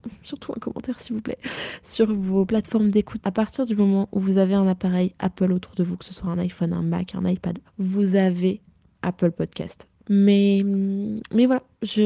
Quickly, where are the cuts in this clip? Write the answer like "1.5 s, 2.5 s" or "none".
3.2 s, 7.6 s, 10.0 s